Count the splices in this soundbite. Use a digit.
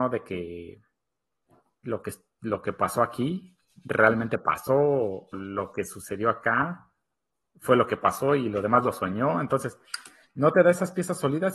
1